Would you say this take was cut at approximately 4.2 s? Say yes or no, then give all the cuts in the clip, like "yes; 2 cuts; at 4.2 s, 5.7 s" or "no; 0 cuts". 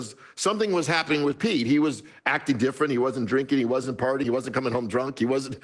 yes; 1 cut; at 4.2 s